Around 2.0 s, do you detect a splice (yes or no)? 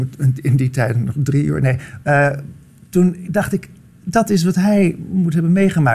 no